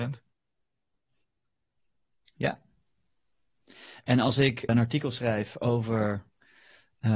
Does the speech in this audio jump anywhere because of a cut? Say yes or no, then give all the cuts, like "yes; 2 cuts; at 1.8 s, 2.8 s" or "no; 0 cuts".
yes; 1 cut; at 4.7 s